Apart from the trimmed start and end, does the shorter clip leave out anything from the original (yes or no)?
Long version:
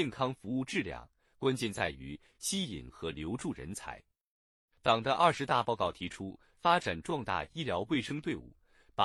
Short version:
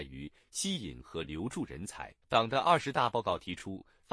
yes